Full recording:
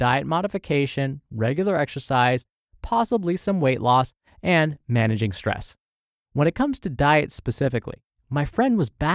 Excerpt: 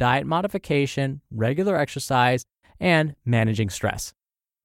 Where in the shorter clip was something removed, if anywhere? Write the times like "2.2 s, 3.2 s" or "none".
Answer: 2.6 s